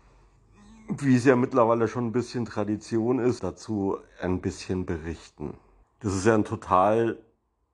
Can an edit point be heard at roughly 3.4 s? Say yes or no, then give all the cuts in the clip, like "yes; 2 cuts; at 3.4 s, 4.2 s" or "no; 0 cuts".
yes; 2 cuts; at 3.4 s, 5.8 s